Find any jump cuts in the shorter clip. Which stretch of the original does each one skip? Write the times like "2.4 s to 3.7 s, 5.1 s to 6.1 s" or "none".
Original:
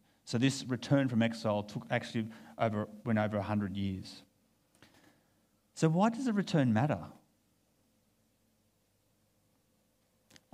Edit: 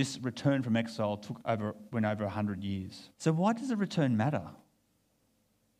1.9 s to 2.5 s, 4.3 s to 5.7 s